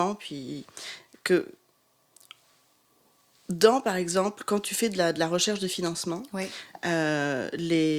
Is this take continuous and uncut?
yes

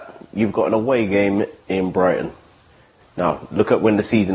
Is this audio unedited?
no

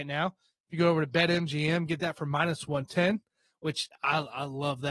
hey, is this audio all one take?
yes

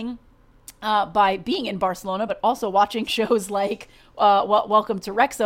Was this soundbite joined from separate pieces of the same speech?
no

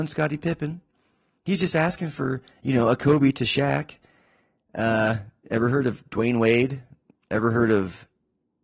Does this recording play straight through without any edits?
yes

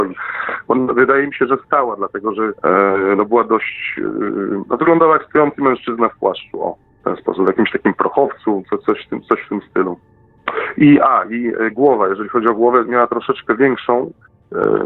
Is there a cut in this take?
yes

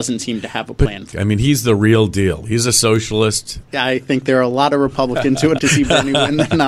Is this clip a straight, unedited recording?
no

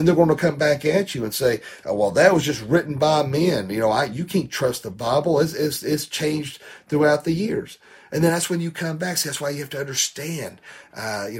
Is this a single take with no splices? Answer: yes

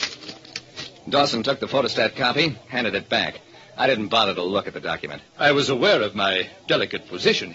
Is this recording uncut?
no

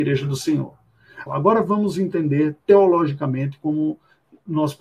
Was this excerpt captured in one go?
no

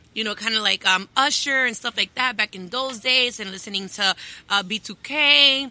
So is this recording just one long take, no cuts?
yes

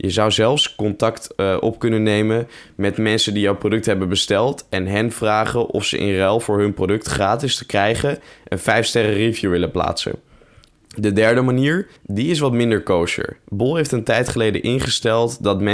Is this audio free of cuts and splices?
no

